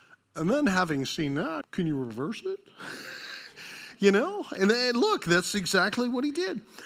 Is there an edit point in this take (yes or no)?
yes